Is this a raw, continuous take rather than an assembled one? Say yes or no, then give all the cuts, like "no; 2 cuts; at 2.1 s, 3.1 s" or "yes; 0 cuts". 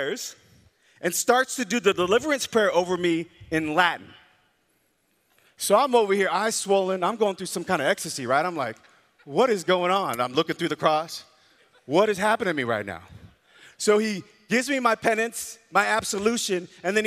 yes; 0 cuts